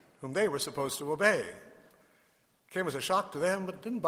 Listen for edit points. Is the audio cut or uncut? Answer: uncut